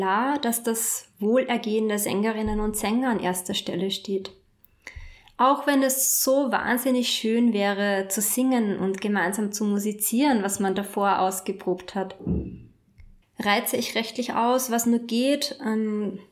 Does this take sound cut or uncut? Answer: cut